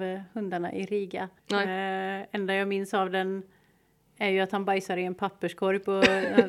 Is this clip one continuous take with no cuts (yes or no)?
no